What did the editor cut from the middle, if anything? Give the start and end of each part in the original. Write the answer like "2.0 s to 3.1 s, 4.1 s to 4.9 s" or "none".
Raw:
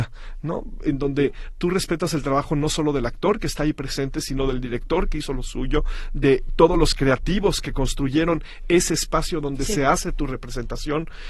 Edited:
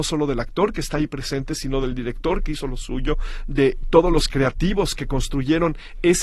none